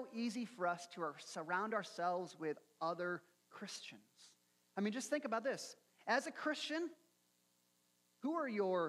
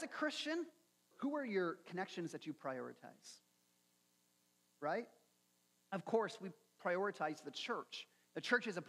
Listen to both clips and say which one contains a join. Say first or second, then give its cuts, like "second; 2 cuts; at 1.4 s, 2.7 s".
second; 1 cut; at 1.1 s